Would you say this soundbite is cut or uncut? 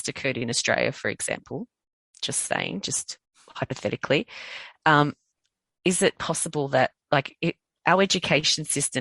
uncut